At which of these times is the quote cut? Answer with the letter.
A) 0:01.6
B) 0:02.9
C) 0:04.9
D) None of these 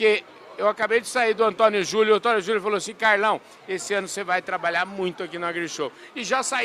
D